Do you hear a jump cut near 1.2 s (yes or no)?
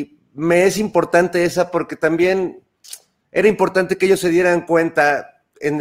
no